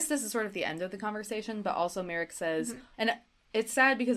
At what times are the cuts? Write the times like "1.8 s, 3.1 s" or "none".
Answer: 2.9 s